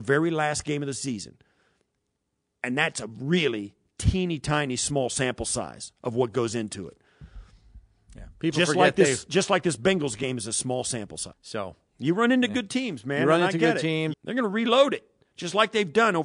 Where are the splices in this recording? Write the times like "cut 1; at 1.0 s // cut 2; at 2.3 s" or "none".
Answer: cut 1; at 11.3 s // cut 2; at 14.1 s